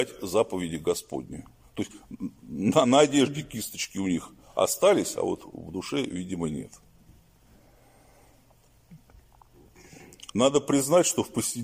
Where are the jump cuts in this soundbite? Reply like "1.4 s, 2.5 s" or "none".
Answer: 10.3 s